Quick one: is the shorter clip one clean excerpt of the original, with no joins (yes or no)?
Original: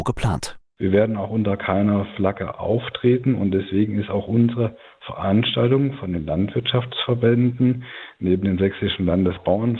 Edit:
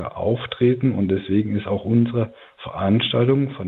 yes